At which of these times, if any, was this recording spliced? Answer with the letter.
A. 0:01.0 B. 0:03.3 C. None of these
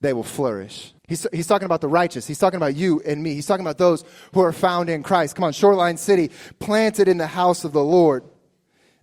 A